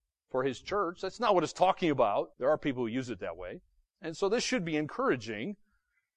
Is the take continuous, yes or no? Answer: no